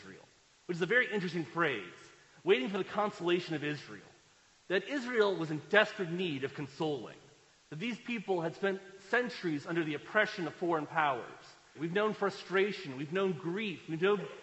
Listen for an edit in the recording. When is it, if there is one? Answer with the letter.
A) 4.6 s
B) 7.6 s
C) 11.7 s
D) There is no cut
C